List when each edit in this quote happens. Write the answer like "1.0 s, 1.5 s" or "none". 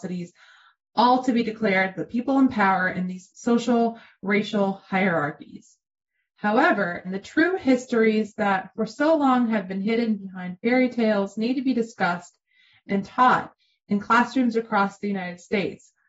7.0 s